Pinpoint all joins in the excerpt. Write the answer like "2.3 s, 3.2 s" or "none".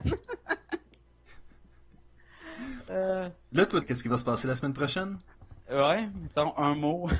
3.8 s